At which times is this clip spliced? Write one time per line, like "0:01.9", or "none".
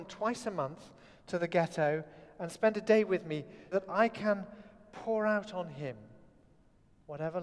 0:03.7